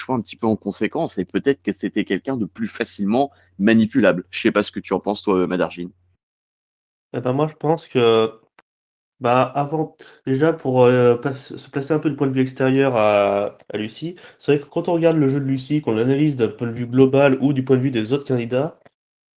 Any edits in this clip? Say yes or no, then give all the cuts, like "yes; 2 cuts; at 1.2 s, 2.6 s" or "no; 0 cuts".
no; 0 cuts